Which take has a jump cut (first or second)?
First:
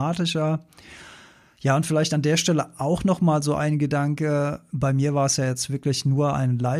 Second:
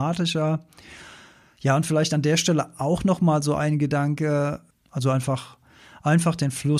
second